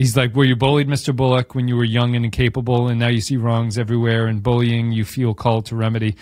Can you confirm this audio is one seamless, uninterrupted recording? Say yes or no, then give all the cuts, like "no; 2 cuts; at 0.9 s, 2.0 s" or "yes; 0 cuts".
yes; 0 cuts